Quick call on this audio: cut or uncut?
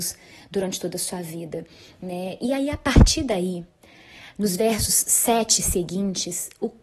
uncut